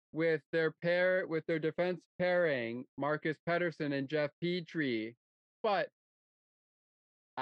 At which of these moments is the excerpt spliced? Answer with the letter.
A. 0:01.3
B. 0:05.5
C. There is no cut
B